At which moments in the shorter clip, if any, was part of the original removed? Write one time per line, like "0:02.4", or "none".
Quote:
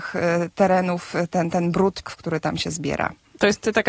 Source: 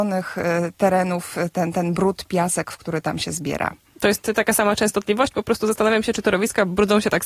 0:02.0